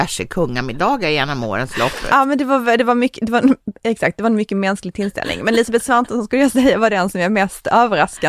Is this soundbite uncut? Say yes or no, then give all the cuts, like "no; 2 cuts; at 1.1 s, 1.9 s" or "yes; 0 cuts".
no; 1 cut; at 2.1 s